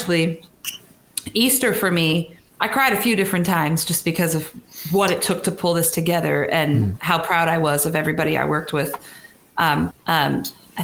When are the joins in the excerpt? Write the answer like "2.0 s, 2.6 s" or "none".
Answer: 9.9 s